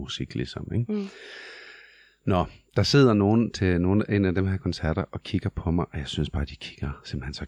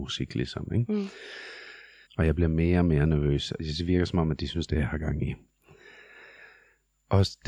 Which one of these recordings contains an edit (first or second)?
second